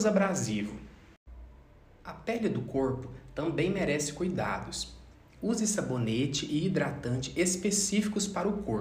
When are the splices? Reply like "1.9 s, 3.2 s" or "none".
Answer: none